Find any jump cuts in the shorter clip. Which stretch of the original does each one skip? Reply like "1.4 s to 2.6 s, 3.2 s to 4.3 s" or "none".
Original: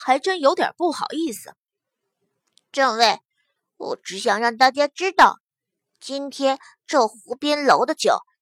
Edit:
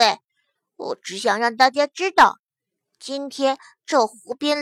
none